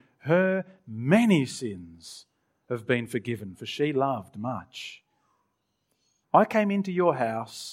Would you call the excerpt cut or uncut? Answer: cut